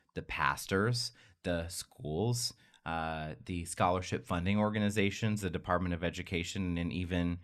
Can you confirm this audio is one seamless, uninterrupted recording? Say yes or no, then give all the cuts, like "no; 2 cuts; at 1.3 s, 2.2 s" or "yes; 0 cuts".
yes; 0 cuts